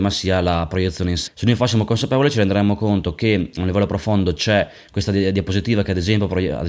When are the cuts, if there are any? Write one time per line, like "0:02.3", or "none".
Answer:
0:01.3